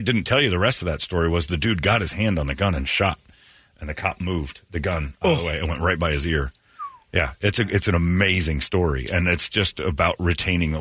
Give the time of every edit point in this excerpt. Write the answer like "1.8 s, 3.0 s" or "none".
none